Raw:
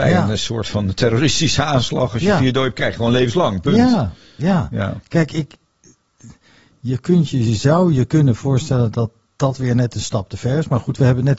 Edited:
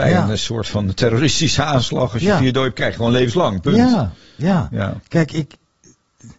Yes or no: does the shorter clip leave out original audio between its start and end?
no